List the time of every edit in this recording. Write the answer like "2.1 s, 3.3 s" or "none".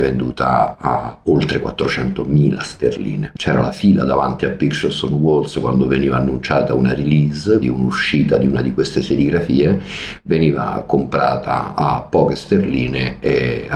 3.4 s, 7.6 s